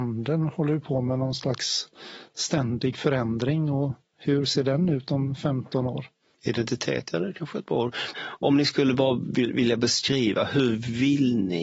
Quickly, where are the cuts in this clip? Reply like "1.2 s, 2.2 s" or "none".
6.3 s, 8.1 s